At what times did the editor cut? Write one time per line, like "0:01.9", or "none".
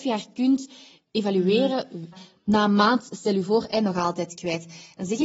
0:02.1